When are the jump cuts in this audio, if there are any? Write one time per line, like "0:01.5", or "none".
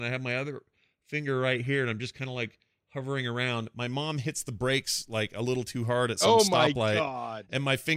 none

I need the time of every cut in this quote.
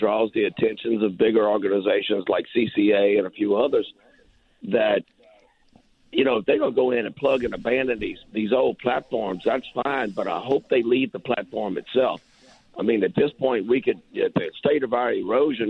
none

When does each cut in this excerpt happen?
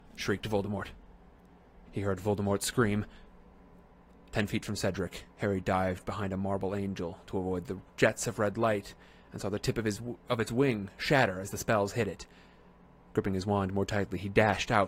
0:01.9

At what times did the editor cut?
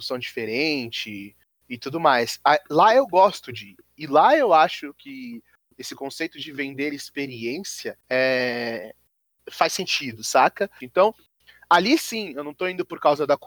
0:08.0
0:10.8

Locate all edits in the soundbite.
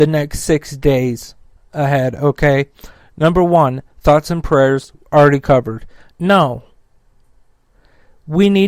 0:06.1

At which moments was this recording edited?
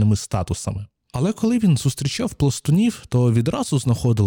none

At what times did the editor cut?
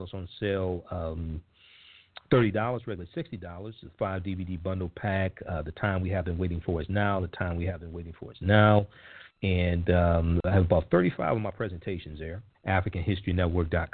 0:09.3
0:12.5

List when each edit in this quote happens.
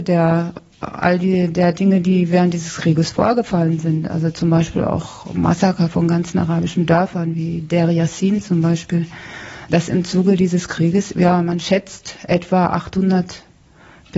0:09.7
0:11.1

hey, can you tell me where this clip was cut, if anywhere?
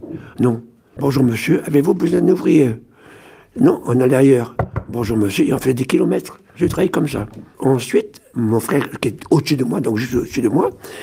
0:01.0

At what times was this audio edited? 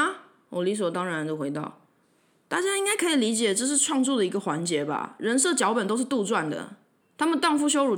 0:07.0

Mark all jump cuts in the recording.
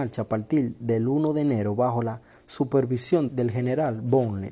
0:03.3

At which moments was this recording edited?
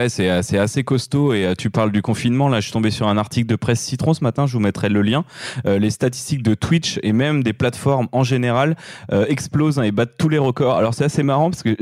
none

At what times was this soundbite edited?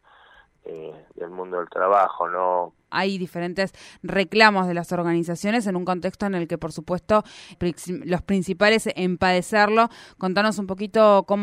0:02.9
0:07.5

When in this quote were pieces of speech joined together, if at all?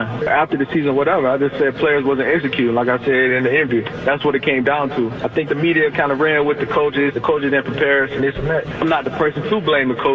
0:07.1

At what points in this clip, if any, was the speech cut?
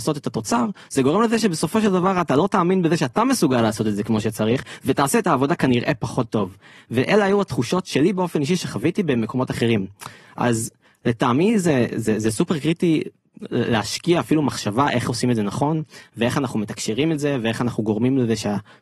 none

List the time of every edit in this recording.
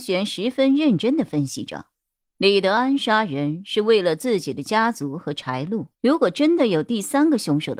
0:02.2
0:05.9

